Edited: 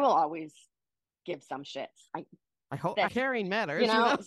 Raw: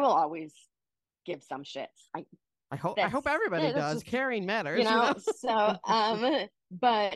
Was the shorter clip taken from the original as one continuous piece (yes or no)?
no